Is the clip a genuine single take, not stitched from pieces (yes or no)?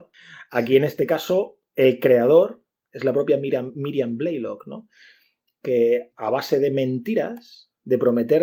yes